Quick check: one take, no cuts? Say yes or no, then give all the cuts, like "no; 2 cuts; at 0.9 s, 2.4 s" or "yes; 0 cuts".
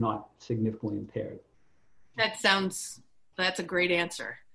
no; 1 cut; at 2.1 s